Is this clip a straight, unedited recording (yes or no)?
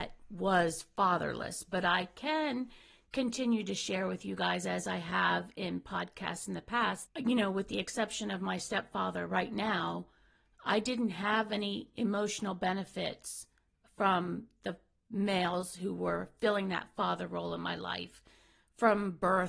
no